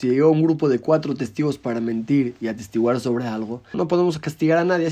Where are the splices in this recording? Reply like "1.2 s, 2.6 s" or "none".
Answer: 3.7 s